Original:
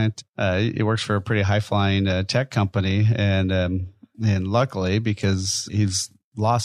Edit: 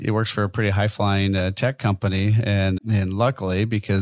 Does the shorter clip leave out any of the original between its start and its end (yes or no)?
yes